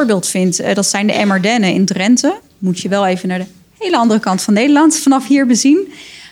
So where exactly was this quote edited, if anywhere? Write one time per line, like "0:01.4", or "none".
none